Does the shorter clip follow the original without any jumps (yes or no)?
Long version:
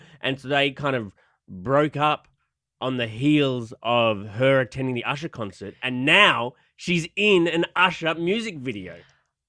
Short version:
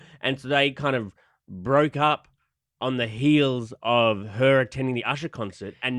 yes